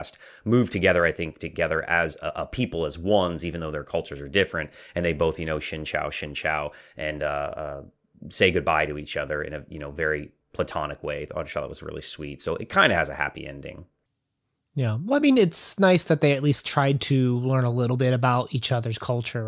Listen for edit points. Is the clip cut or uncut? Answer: uncut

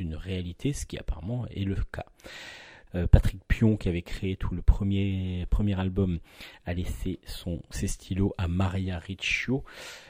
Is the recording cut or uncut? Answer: cut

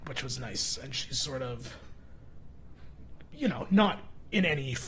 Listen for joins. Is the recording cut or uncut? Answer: uncut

